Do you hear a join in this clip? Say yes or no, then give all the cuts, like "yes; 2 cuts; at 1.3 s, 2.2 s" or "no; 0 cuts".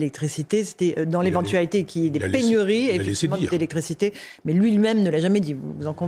no; 0 cuts